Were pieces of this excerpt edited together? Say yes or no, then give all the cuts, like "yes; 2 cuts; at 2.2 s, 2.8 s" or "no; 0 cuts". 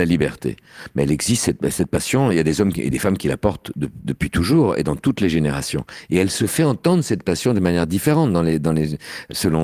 no; 0 cuts